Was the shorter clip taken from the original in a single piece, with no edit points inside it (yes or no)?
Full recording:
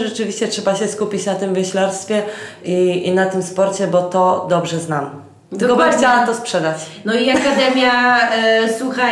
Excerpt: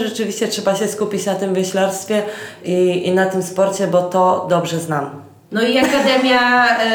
no